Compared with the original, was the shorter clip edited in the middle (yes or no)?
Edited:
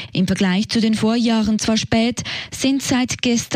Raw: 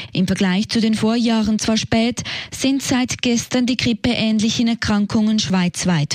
no